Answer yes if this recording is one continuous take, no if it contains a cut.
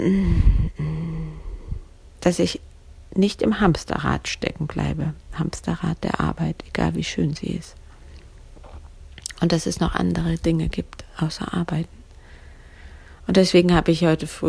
yes